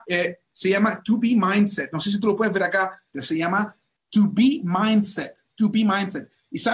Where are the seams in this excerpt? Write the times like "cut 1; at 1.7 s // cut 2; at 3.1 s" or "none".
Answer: cut 1; at 3.1 s